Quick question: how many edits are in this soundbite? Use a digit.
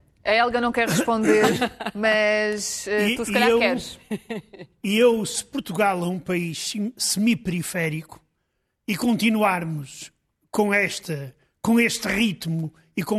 0